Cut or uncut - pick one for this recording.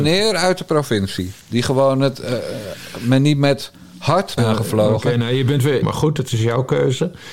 cut